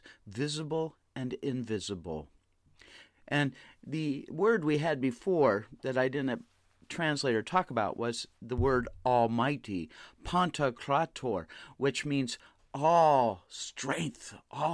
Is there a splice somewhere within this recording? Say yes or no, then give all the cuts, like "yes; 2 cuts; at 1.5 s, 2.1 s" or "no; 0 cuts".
no; 0 cuts